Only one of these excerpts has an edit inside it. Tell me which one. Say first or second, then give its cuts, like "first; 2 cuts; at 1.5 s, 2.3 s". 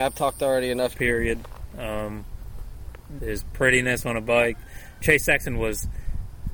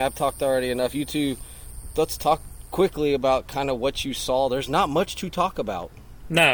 first; 3 cuts; at 0.9 s, 3.2 s, 5.0 s